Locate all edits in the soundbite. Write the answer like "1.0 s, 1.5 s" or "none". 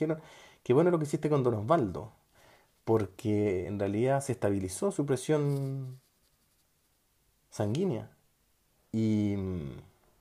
8.8 s